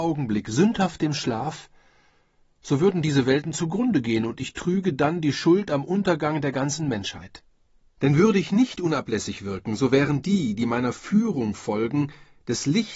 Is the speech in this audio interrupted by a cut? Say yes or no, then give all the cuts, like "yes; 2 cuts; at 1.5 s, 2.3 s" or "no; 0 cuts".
yes; 1 cut; at 7.8 s